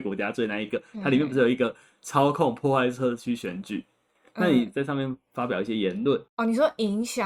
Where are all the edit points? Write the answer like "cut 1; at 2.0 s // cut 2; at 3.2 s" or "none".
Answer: cut 1; at 6.3 s